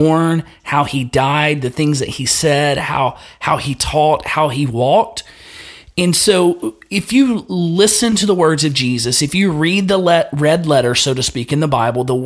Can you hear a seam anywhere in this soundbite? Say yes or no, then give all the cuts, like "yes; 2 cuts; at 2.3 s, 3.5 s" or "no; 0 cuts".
no; 0 cuts